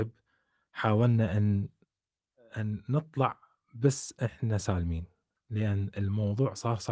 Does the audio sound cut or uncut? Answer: uncut